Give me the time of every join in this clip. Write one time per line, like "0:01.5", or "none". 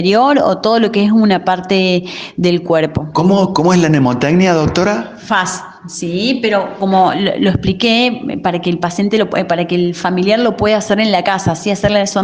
0:03.1